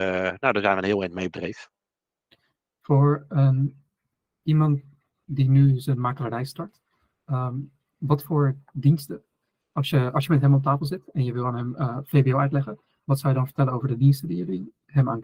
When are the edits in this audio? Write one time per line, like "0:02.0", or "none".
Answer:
none